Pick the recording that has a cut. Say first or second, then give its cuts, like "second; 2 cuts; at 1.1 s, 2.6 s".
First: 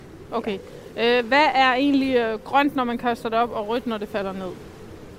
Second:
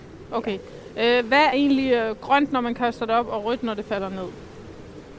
second; 1 cut; at 1.5 s